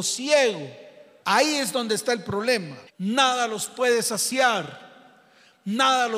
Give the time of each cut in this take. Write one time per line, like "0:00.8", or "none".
0:01.2
0:02.9